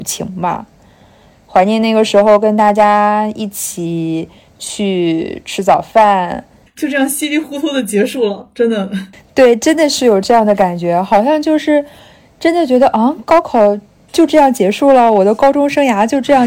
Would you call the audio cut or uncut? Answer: cut